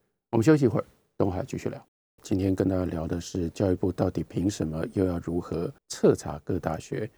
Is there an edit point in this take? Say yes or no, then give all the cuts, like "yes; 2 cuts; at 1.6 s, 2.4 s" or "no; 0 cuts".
yes; 2 cuts; at 2.2 s, 5.8 s